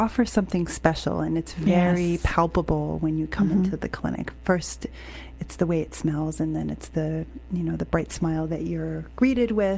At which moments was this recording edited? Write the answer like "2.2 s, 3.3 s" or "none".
none